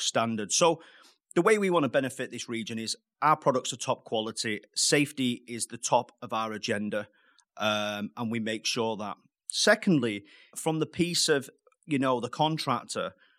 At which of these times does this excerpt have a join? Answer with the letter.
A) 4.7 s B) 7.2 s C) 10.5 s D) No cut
C